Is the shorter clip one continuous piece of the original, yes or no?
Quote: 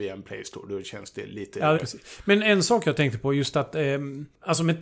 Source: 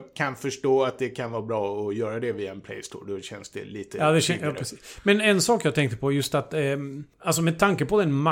no